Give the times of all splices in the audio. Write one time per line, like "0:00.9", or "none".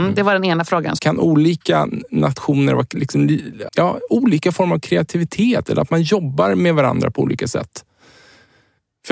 0:01.0
0:03.7